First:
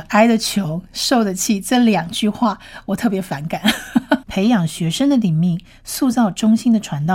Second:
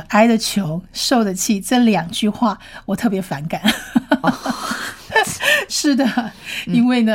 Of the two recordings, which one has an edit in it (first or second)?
first